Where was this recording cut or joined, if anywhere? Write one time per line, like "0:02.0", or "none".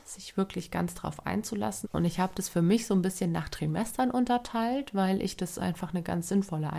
0:01.8

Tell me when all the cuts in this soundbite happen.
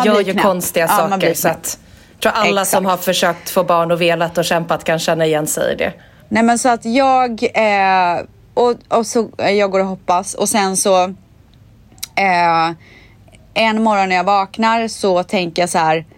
0:06.2

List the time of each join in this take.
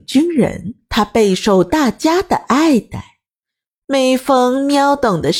none

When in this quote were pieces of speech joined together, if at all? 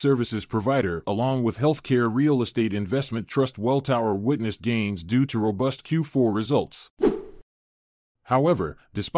0:08.0

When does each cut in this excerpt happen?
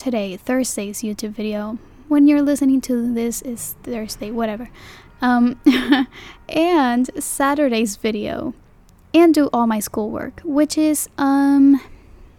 none

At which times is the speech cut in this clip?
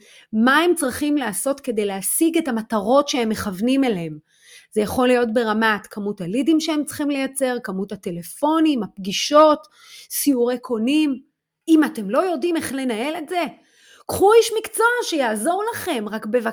none

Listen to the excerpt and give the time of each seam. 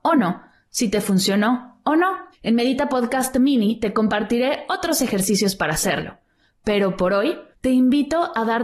0:02.3
0:07.5

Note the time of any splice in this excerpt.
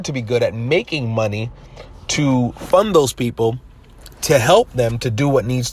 none

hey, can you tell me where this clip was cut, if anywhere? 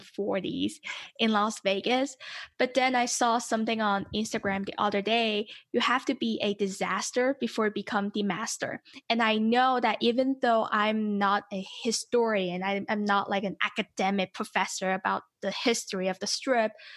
none

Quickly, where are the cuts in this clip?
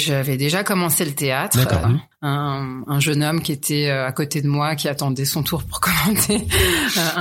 0:01.8

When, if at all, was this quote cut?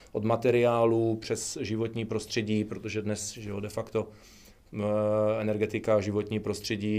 none

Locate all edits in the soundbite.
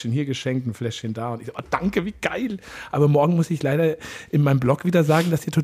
none

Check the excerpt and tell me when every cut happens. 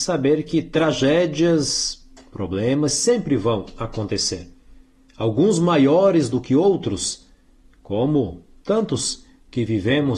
none

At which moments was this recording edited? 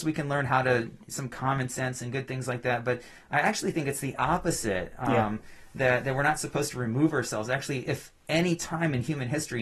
none

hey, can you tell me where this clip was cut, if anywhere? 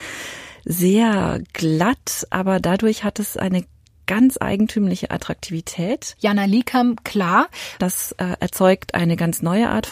0:06.2
0:07.8

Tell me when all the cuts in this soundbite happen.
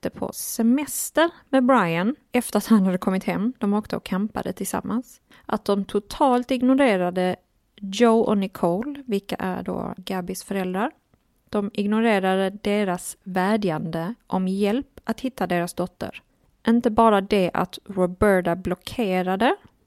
0:10.0

